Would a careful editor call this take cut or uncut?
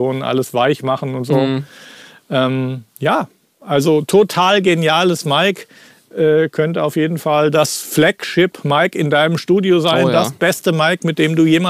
uncut